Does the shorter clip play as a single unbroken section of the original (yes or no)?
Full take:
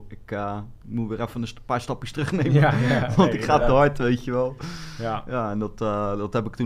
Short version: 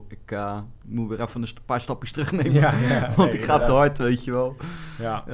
yes